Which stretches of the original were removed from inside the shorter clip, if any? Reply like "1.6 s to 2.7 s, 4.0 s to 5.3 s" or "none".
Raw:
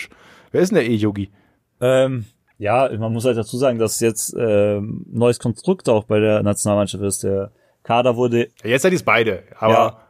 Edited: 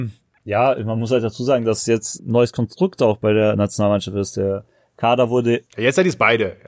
4.3 s to 5.0 s